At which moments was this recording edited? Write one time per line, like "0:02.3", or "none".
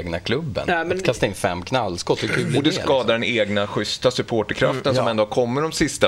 none